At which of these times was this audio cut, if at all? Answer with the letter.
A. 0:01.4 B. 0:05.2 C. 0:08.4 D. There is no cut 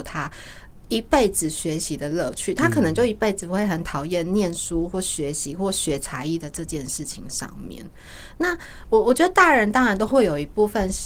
D